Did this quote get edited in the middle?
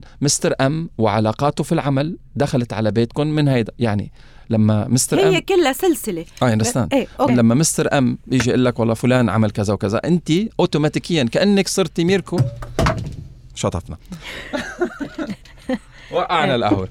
yes; 1 cut; at 7.3 s

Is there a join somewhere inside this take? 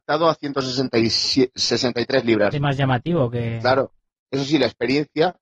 yes; 2 cuts; at 2.5 s, 4.1 s

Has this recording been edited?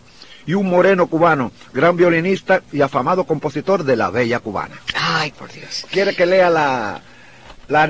yes; 1 cut; at 5.3 s

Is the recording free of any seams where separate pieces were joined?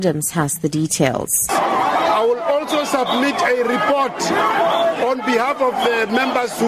no; 1 cut; at 1.5 s

